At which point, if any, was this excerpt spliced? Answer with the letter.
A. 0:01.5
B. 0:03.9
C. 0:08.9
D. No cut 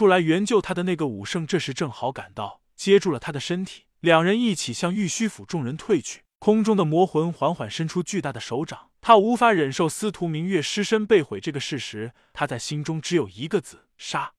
C